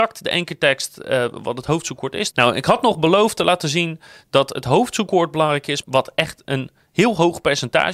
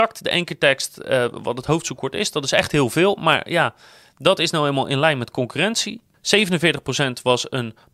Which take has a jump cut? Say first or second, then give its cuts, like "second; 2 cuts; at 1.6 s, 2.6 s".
first; 2 cuts; at 2.3 s, 5.8 s